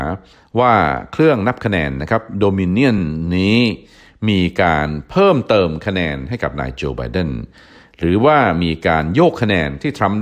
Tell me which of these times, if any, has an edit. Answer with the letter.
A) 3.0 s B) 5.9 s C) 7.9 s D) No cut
D